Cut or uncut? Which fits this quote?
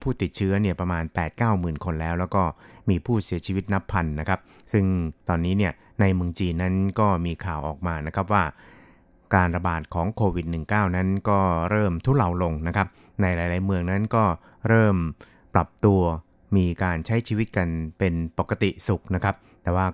uncut